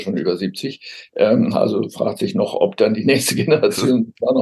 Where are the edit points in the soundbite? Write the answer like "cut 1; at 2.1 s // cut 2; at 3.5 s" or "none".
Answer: none